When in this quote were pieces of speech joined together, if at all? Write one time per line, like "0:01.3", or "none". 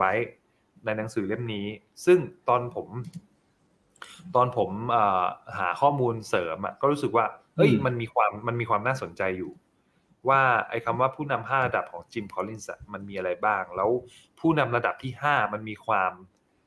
none